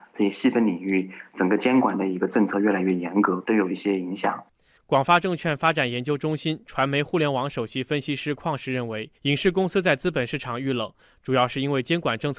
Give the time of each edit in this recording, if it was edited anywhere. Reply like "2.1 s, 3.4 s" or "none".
3.4 s, 4.8 s, 9.2 s